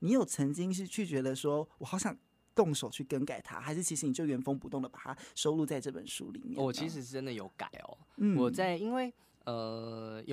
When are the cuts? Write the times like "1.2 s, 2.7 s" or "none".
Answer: none

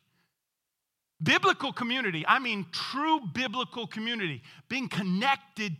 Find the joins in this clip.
none

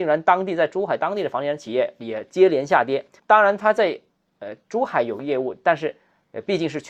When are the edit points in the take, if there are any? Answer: 3.2 s

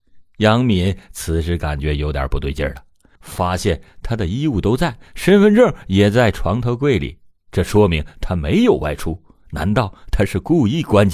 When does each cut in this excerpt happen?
3.2 s

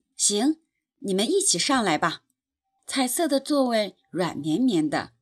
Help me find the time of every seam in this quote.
2.8 s

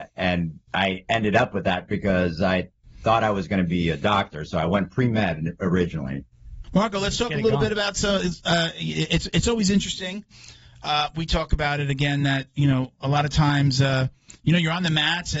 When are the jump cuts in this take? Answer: 6.6 s

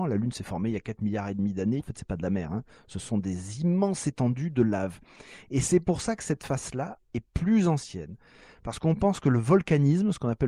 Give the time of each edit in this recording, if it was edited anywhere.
1.8 s

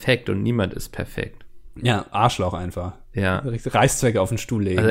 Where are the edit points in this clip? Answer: 1.7 s

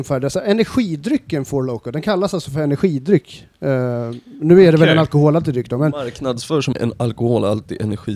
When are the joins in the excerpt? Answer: 6.7 s

